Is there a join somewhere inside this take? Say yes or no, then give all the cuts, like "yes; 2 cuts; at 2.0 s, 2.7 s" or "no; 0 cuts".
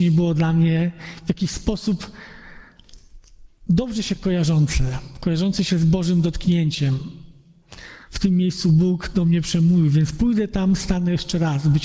no; 0 cuts